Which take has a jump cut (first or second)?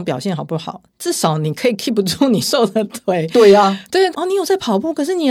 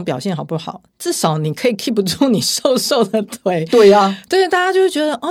first